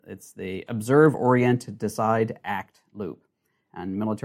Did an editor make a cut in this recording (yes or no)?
no